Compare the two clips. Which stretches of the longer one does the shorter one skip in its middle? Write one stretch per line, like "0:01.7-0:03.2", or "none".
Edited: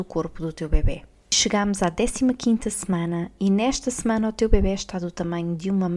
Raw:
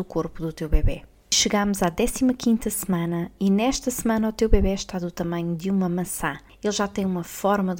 none